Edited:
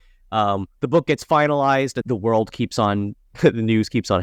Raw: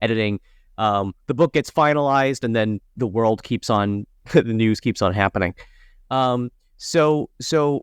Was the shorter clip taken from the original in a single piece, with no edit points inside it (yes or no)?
no